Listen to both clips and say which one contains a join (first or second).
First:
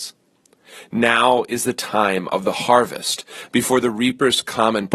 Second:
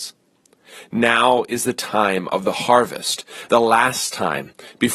first